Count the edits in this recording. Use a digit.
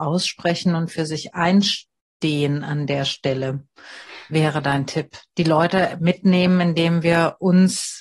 0